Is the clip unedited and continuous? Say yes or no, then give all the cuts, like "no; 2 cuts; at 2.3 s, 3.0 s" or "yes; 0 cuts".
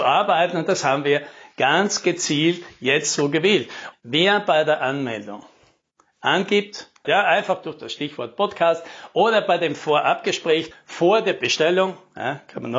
no; 3 cuts; at 3.9 s, 7.0 s, 10.7 s